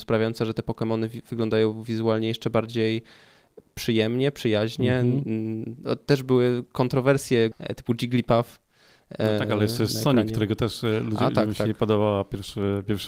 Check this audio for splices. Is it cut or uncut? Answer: cut